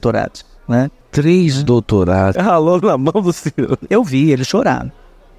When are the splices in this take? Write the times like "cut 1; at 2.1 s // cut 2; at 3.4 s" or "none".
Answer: cut 1; at 1.0 s // cut 2; at 2.3 s